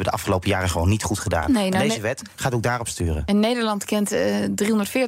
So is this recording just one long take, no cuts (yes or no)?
yes